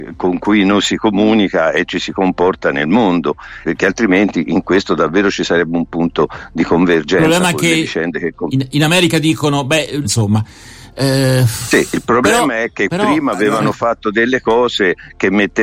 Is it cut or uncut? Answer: cut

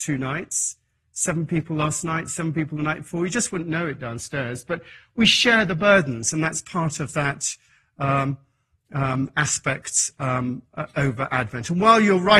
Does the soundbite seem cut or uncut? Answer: uncut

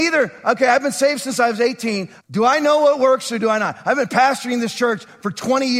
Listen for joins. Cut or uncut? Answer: cut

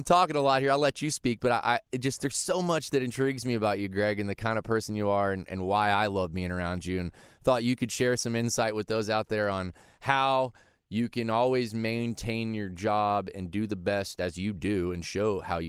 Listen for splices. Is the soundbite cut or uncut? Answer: uncut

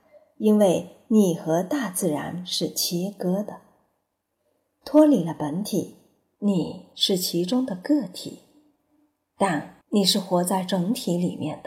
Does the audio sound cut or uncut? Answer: cut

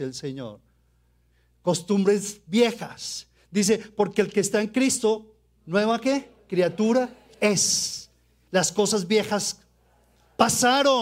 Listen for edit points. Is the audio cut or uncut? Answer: uncut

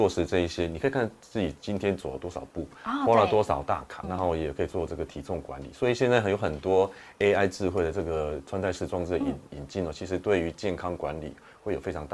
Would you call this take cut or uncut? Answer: cut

